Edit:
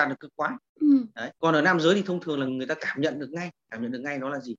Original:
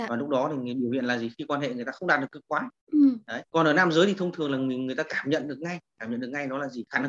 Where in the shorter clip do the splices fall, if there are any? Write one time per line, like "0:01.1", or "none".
0:02.5